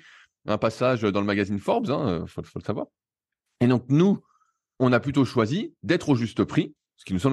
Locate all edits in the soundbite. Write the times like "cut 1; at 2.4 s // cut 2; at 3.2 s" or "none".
none